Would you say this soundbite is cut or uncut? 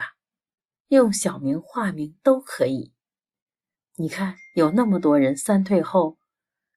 cut